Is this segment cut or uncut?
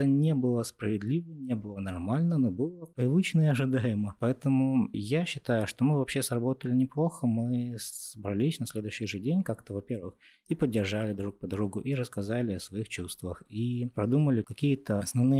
cut